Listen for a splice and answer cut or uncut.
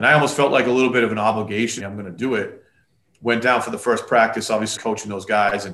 cut